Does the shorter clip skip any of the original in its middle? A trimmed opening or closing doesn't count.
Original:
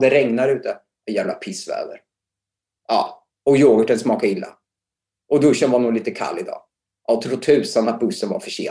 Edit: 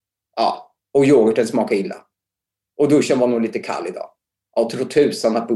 no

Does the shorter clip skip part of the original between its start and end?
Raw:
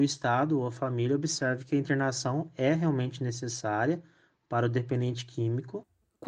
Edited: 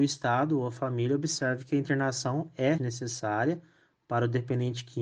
yes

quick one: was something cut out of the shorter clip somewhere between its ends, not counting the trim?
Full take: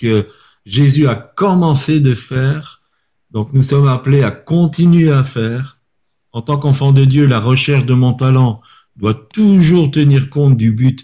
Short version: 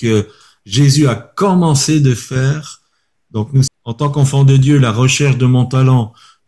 yes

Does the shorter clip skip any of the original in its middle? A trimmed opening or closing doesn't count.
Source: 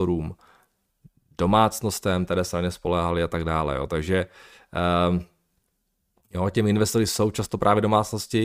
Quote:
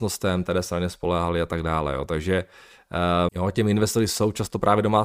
yes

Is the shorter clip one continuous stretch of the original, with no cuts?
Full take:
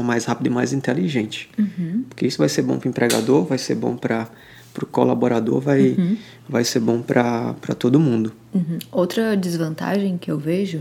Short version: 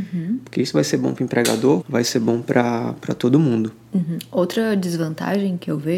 no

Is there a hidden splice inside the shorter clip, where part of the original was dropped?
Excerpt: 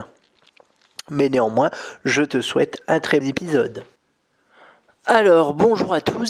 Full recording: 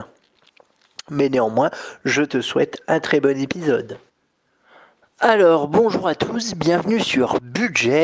yes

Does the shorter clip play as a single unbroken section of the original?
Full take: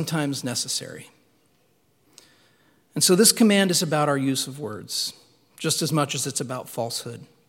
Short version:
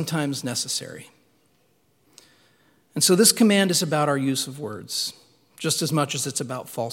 yes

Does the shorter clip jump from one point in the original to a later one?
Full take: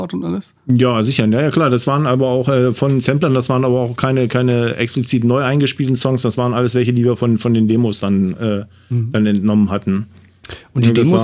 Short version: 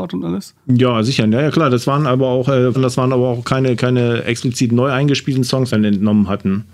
yes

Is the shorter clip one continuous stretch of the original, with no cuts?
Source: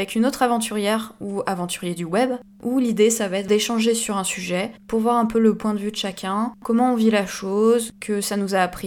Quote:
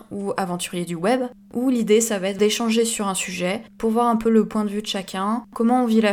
yes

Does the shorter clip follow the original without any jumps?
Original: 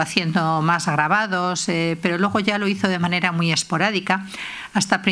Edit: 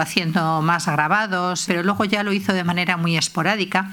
no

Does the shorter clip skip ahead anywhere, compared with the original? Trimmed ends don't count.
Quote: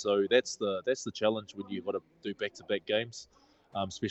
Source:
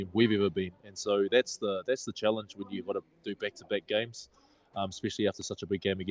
no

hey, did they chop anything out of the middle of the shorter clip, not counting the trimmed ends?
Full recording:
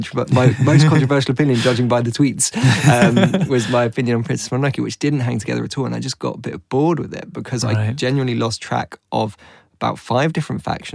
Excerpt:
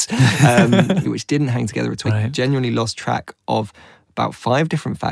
yes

